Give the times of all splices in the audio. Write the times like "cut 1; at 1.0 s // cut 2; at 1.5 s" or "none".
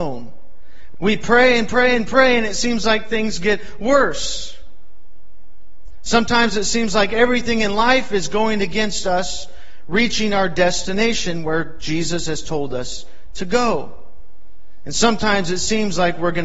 cut 1; at 0.9 s